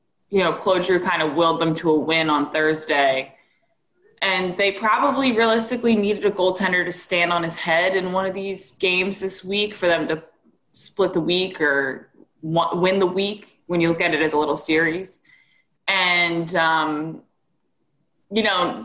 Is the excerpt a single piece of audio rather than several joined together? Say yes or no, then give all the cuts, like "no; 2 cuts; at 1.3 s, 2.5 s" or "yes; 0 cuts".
no; 1 cut; at 14.3 s